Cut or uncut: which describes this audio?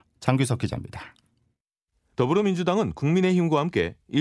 uncut